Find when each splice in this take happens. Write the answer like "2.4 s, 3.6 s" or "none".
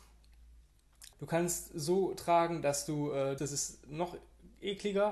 1.1 s, 3.4 s